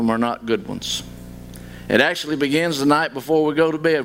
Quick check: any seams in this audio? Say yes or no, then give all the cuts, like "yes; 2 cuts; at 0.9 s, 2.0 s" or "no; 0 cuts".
no; 0 cuts